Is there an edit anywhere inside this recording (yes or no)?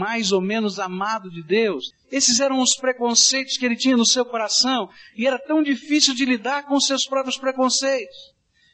yes